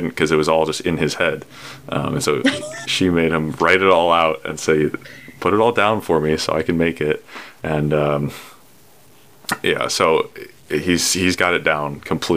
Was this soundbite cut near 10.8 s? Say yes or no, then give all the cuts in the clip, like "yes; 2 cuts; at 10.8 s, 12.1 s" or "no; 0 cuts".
no; 0 cuts